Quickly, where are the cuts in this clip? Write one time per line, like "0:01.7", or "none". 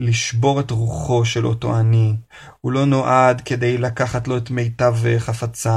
none